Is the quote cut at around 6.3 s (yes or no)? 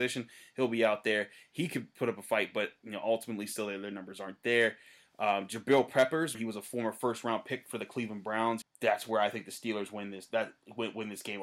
yes